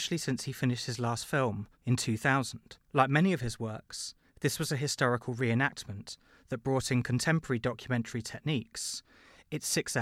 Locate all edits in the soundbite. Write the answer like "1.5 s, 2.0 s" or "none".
1.7 s, 2.8 s